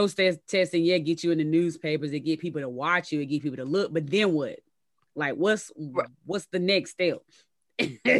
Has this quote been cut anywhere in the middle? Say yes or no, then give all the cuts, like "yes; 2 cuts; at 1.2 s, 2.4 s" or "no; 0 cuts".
no; 0 cuts